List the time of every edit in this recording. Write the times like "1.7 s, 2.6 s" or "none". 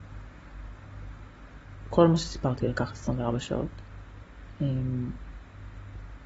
none